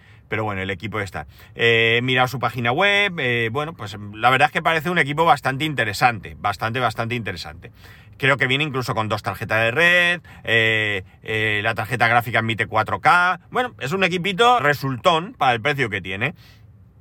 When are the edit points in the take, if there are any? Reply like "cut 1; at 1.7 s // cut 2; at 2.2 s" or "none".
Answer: cut 1; at 14.6 s